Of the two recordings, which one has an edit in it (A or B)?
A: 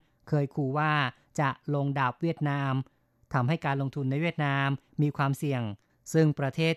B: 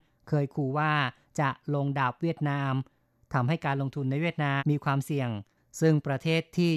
B